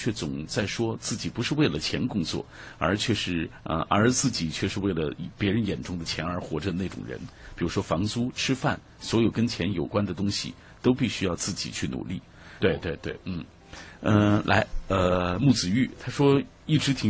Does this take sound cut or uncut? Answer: cut